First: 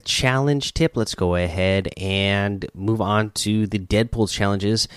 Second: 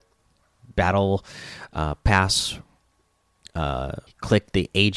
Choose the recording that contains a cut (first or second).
second